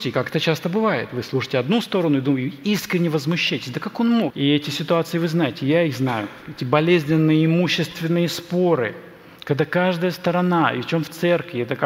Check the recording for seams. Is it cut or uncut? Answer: cut